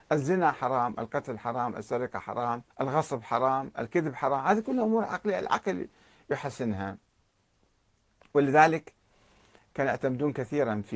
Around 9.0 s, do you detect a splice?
no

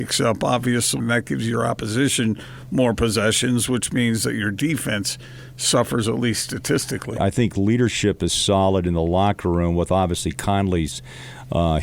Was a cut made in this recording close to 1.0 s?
yes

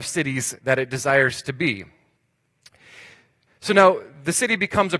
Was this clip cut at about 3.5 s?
yes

